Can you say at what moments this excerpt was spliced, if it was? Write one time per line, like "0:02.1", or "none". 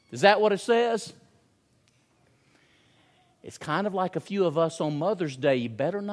none